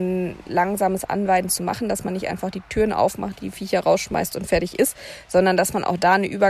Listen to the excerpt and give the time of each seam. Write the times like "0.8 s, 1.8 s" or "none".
none